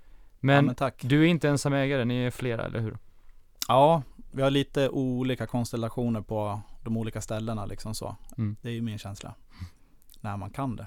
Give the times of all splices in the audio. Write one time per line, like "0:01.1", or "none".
0:08.3